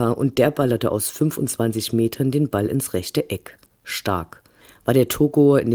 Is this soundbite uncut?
yes; 0 cuts

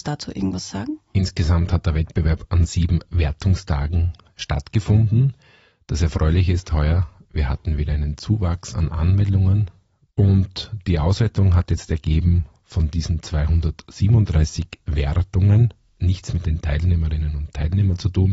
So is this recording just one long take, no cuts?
no; 2 cuts; at 10.1 s, 15.9 s

